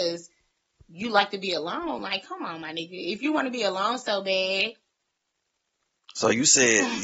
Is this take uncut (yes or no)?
yes